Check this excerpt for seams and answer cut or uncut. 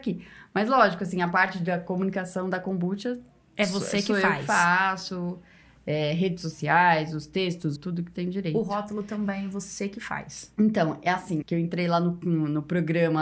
cut